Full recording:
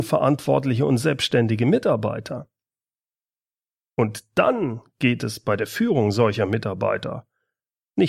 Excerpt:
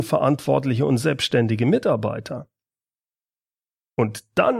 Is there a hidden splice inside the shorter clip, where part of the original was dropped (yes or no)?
no